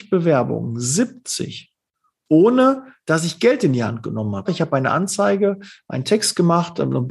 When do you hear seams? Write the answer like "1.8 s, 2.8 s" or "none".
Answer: 4.5 s